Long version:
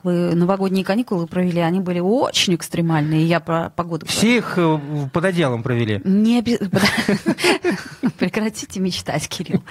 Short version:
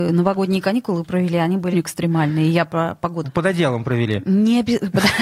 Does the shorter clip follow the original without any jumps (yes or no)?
no